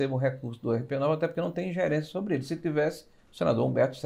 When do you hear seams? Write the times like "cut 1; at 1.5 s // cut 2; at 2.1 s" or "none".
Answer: none